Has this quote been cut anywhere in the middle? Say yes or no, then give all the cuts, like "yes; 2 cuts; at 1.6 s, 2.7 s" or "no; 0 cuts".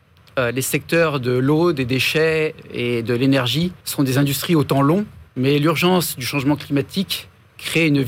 yes; 2 cuts; at 3.8 s, 5.3 s